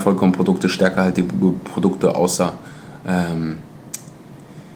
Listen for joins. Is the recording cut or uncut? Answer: uncut